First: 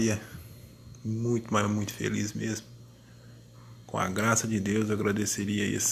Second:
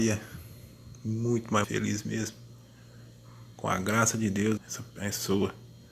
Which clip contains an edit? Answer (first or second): second